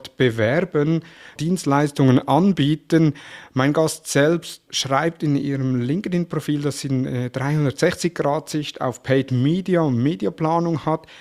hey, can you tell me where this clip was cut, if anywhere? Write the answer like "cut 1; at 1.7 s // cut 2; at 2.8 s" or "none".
cut 1; at 1.4 s // cut 2; at 4.7 s